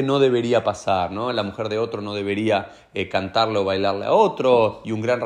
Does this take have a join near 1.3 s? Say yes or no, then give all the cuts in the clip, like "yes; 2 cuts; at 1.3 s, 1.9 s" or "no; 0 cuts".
no; 0 cuts